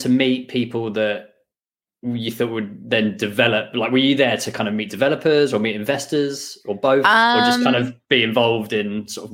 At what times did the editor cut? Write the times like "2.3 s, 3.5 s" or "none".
none